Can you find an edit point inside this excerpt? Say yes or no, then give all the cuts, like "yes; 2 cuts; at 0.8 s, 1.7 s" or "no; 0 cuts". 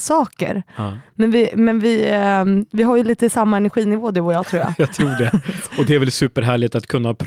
no; 0 cuts